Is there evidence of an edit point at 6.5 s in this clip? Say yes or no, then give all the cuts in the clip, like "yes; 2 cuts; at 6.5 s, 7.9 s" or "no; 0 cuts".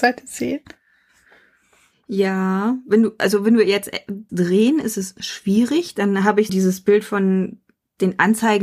yes; 2 cuts; at 4.3 s, 6.5 s